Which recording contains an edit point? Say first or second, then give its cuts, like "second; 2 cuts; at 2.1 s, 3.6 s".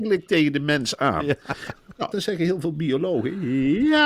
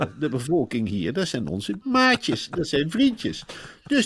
first; 1 cut; at 2.1 s